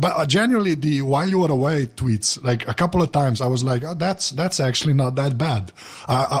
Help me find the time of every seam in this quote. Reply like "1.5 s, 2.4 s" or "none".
none